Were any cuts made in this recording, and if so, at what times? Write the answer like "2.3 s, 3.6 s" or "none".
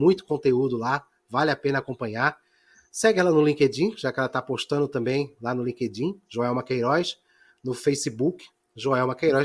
none